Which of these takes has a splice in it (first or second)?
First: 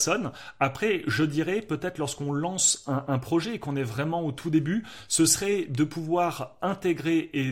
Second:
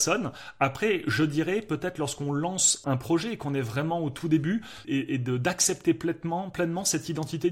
second